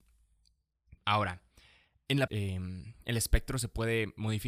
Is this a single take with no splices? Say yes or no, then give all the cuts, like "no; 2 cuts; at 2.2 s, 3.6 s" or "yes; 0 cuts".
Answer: no; 2 cuts; at 1.0 s, 2.3 s